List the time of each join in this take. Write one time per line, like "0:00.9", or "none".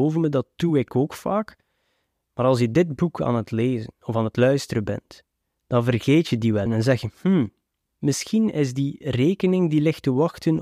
0:06.7